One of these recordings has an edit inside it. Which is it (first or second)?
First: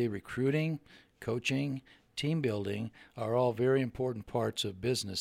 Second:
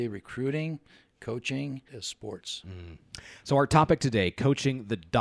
second